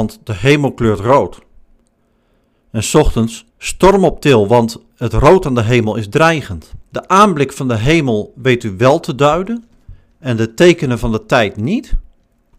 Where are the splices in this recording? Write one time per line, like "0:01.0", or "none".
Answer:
0:03.5
0:06.8